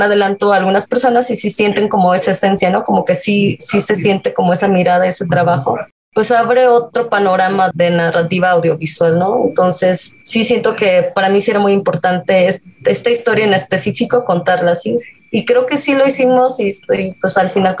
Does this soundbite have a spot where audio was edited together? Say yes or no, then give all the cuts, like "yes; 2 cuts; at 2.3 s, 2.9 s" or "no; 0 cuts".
no; 0 cuts